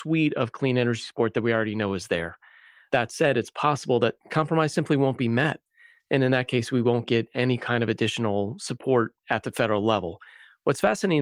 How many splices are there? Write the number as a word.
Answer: zero